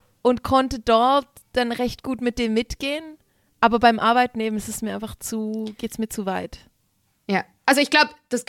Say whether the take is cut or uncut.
uncut